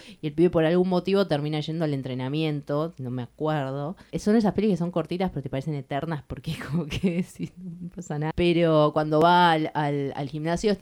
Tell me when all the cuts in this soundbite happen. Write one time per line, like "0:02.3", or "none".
0:04.1
0:08.3